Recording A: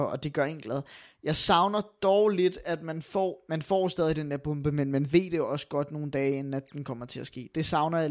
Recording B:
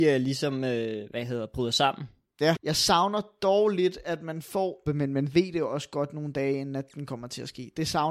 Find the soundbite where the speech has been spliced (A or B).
B